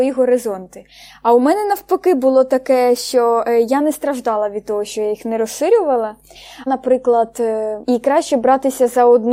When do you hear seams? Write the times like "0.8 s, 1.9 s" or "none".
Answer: 6.7 s, 7.8 s